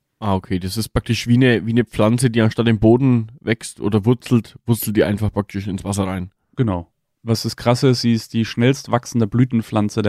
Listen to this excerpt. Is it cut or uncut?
uncut